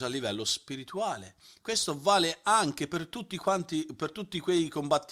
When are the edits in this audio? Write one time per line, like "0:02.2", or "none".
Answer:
none